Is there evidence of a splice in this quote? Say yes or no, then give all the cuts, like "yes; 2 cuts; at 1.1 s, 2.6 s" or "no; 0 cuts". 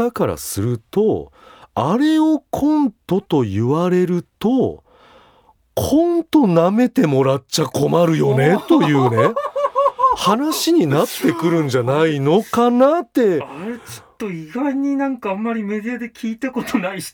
no; 0 cuts